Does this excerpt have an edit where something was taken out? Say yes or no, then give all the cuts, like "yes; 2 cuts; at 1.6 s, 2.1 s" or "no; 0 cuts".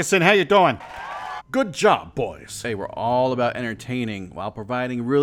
yes; 1 cut; at 1.4 s